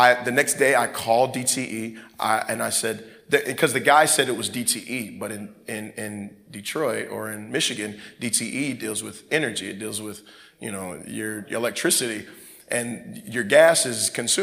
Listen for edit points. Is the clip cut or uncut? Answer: uncut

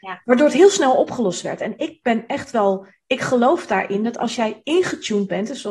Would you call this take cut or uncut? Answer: uncut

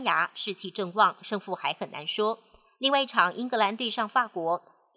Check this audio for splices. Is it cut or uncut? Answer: uncut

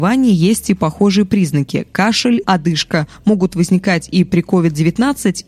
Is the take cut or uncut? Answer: cut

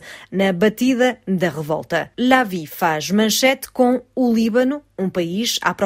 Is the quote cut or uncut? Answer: uncut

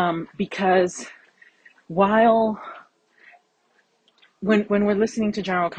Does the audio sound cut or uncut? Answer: cut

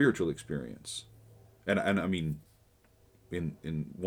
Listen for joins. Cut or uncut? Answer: uncut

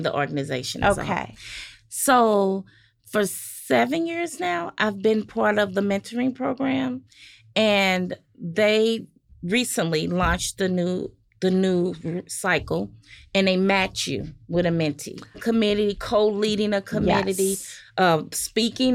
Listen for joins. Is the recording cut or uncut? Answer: cut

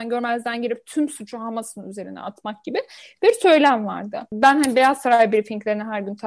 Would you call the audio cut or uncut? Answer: uncut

